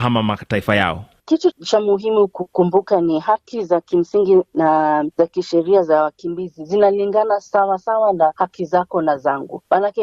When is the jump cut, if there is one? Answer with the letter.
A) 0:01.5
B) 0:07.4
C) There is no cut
A